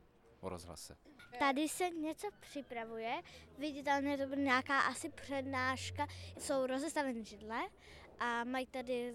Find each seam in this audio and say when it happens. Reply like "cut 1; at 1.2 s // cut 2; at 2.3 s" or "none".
cut 1; at 1.3 s // cut 2; at 6.3 s